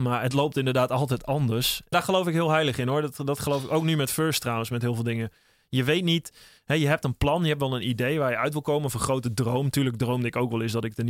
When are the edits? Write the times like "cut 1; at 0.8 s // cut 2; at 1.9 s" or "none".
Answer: cut 1; at 1.9 s